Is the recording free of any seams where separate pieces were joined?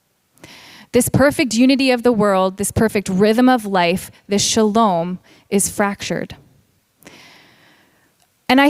yes; 0 cuts

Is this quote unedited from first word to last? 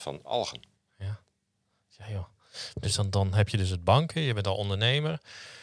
yes; 0 cuts

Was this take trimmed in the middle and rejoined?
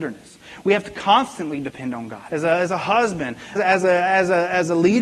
yes; 2 cuts; at 2.3 s, 3.6 s

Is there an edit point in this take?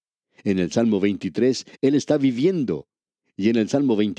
no; 0 cuts

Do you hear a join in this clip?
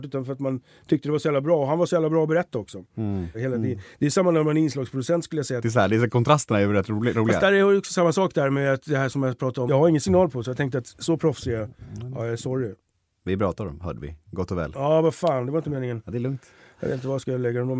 yes; 3 cuts; at 3.3 s, 5.6 s, 9.7 s

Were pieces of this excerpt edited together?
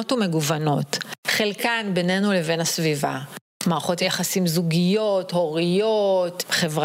no; 0 cuts

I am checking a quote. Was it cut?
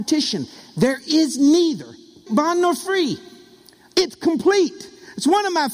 yes; 1 cut; at 2.3 s

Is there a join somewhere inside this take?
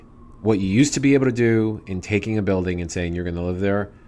no; 0 cuts

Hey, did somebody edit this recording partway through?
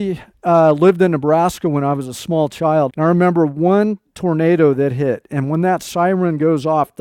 yes; 1 cut; at 2.9 s

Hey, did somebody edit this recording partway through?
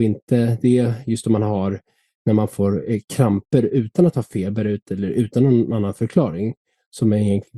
no; 0 cuts

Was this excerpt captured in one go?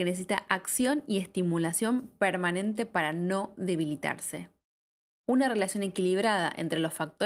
yes; 0 cuts

